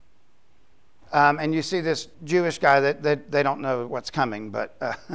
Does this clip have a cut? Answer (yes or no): yes